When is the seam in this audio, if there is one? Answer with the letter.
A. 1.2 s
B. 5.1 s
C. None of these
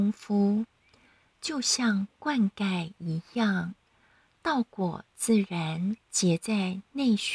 C